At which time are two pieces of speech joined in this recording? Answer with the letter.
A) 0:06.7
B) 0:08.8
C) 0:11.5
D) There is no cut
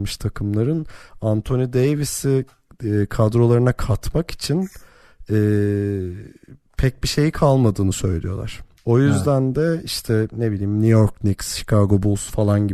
B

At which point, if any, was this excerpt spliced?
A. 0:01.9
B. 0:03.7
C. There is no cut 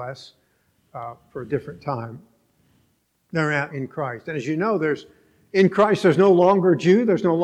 B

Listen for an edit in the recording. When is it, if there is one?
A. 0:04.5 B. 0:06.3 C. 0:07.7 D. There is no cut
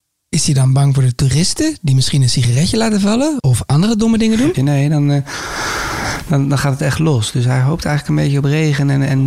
A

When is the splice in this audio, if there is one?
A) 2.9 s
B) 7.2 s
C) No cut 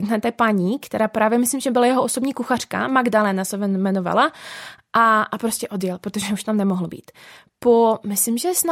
C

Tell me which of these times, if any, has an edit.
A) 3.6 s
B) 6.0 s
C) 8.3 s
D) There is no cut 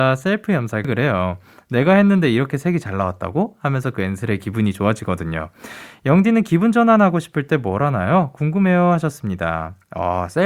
D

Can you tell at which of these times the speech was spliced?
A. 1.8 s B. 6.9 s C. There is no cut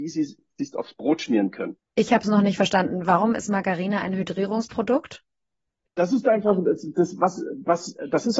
A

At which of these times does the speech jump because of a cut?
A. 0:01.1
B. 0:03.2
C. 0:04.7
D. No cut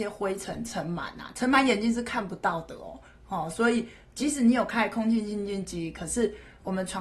D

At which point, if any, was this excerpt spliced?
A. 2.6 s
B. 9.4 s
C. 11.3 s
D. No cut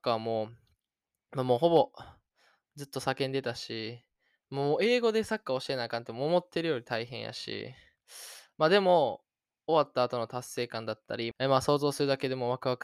C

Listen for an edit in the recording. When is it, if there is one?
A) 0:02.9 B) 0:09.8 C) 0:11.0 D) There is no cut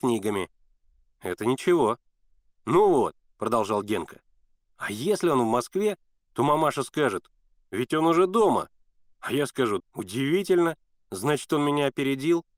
B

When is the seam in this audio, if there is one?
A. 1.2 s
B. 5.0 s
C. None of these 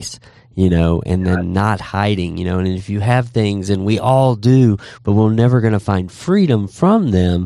B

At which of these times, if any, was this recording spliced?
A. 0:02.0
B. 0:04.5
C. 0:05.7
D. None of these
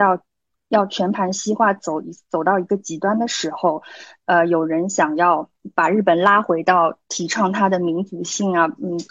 D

